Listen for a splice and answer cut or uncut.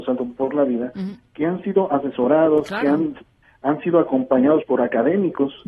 uncut